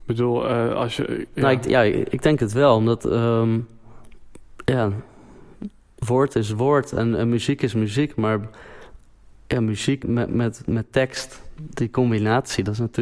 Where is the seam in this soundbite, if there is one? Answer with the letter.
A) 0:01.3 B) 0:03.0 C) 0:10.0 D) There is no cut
C